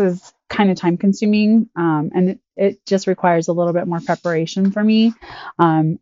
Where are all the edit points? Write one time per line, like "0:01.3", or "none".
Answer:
none

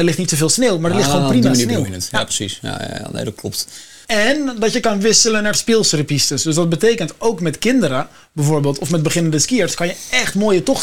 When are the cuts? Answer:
0:04.0

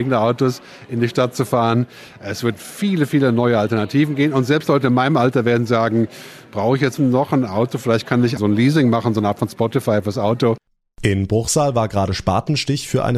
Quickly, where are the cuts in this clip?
0:07.0
0:08.4

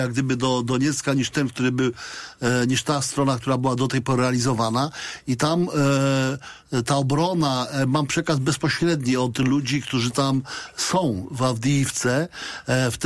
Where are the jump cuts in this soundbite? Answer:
none

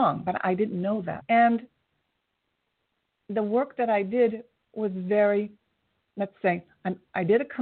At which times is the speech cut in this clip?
0:01.2

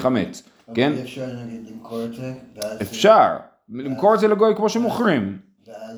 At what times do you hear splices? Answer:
none

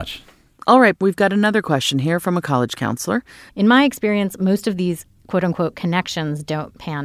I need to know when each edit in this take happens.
0:01.0
0:03.5

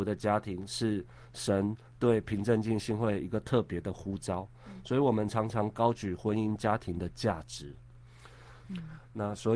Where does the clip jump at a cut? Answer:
0:08.6

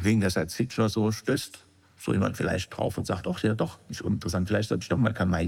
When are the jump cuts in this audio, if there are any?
none

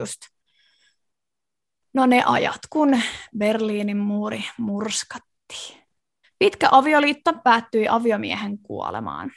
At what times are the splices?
0:06.2

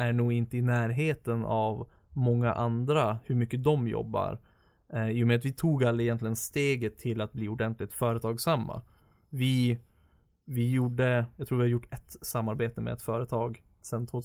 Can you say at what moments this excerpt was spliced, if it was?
none

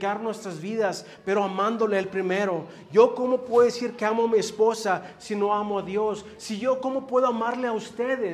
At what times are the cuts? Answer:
0:06.4

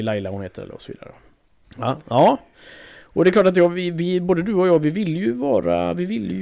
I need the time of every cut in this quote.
0:01.6

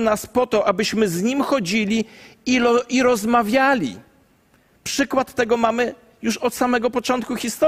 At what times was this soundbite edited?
none

